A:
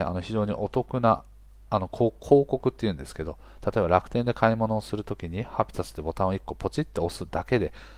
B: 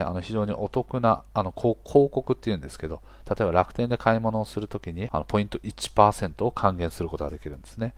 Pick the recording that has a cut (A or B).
B